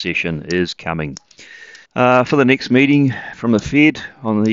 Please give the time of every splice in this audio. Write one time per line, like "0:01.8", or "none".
0:01.8

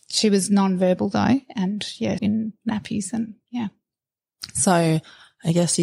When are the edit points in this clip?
0:02.2

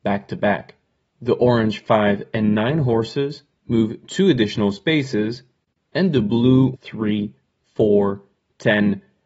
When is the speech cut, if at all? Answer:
0:01.0
0:06.7

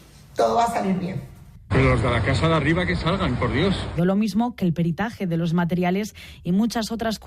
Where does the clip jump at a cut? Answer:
0:01.7
0:04.0

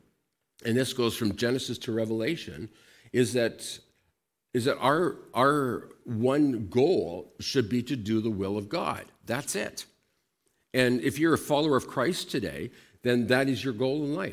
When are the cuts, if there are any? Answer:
none

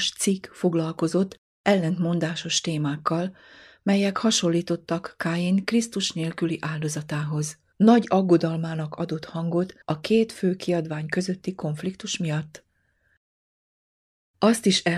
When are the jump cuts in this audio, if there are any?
0:07.7
0:09.8

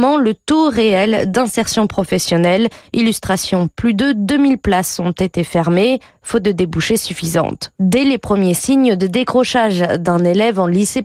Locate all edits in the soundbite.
0:03.7
0:07.8

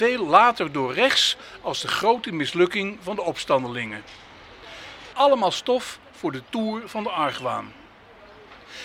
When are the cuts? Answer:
0:05.1

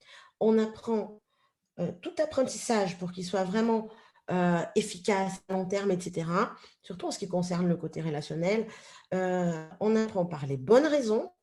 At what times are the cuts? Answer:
none

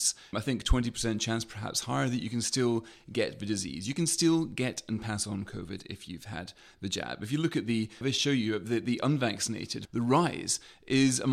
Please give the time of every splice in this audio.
0:08.0
0:09.9

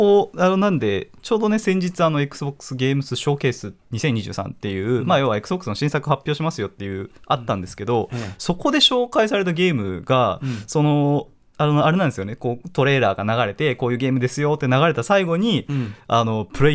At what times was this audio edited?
none

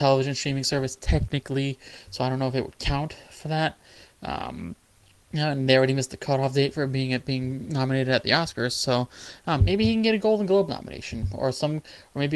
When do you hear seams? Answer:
0:09.6

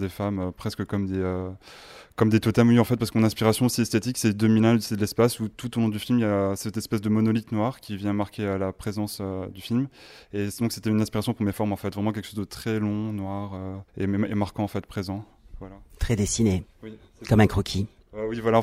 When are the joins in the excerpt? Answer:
0:13.9

